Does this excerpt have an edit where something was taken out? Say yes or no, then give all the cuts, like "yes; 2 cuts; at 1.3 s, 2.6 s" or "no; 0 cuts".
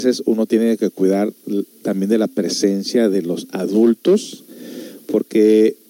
no; 0 cuts